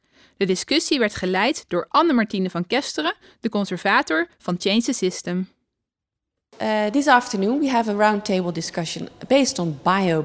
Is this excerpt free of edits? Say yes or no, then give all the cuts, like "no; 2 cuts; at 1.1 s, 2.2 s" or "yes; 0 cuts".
yes; 0 cuts